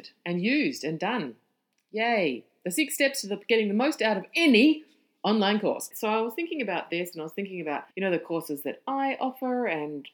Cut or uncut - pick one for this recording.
cut